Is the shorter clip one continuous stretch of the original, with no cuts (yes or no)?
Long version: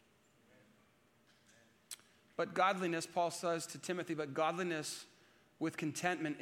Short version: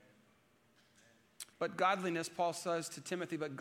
no